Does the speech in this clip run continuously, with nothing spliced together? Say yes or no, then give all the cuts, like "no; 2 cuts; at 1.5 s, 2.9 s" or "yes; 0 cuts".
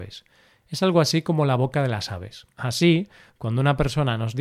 no; 1 cut; at 2.5 s